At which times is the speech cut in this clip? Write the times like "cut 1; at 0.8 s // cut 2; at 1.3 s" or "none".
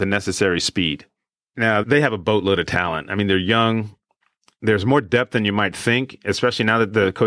cut 1; at 1.8 s